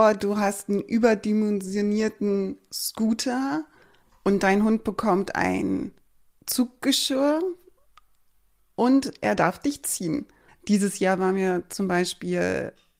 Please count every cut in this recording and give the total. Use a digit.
1